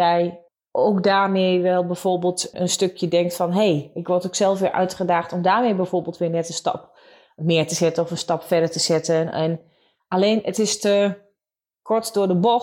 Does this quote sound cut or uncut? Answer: cut